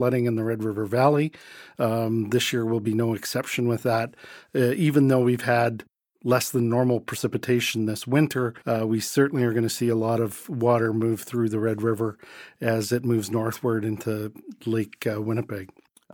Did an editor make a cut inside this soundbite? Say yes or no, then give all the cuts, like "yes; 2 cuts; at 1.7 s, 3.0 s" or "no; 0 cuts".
yes; 1 cut; at 8.6 s